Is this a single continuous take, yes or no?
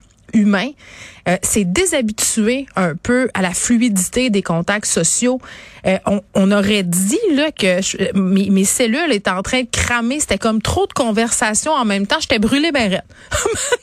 yes